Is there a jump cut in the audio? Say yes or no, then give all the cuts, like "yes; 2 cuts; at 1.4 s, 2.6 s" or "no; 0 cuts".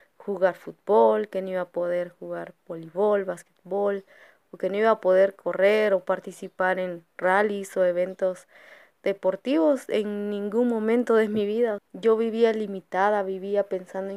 yes; 1 cut; at 11.8 s